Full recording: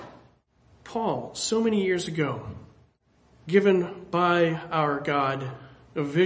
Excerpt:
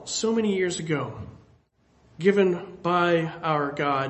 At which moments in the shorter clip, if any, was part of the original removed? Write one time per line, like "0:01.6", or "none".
none